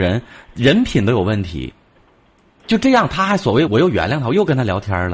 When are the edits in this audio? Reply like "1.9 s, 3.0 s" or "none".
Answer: 3.7 s